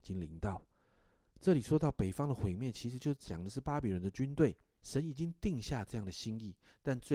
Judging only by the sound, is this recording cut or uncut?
cut